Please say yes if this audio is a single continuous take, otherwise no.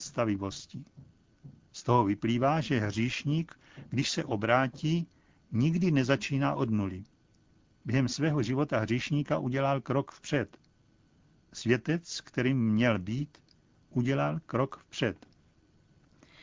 yes